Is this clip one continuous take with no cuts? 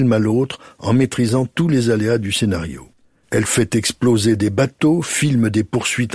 yes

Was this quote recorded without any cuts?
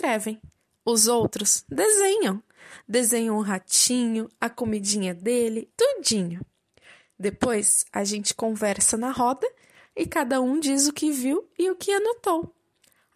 no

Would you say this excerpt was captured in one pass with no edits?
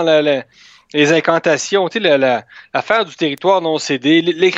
yes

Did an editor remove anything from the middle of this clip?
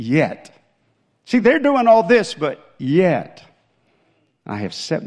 no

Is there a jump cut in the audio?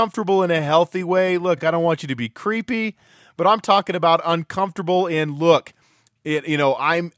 no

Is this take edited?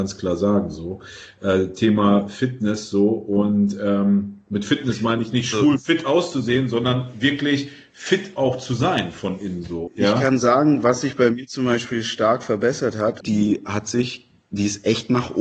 yes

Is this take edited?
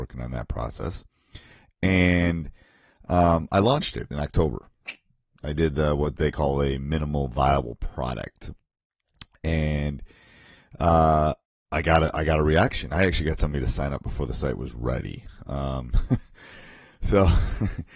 no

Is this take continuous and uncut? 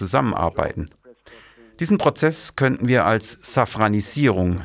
yes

